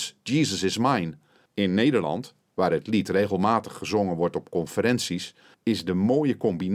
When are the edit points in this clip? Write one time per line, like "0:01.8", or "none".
0:01.5
0:05.5